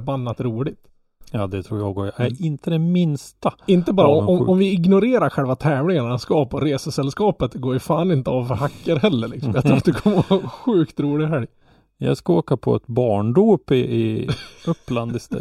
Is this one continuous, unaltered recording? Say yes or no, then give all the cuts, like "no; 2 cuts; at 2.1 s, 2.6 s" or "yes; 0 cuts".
yes; 0 cuts